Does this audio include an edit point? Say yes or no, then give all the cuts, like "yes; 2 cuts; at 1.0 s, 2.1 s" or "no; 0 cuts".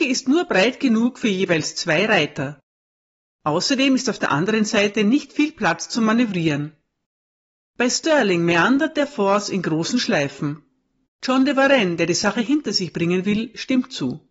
yes; 1 cut; at 11.1 s